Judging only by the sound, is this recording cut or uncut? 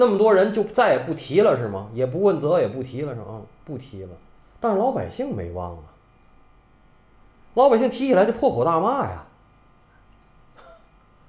uncut